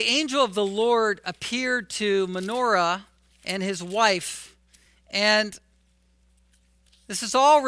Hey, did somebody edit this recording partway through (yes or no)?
no